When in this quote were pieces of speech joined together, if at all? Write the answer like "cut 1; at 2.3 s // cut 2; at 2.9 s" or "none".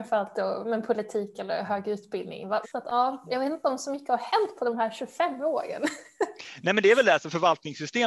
cut 1; at 2.6 s